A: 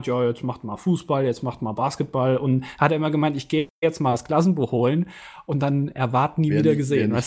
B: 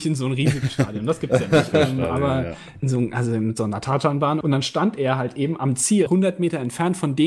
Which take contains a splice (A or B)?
B